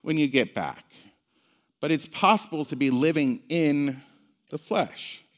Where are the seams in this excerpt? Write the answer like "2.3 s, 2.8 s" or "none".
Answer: 2.7 s